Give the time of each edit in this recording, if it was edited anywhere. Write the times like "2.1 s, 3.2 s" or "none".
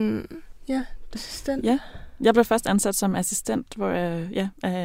1.1 s